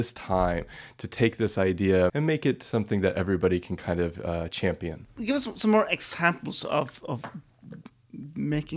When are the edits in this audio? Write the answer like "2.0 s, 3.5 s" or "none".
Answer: 2.1 s